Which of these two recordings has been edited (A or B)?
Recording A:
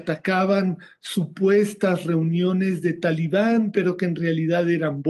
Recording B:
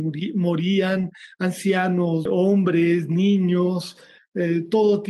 B